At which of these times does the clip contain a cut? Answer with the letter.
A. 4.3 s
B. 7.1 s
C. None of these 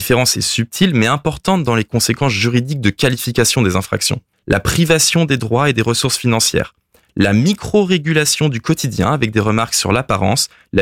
A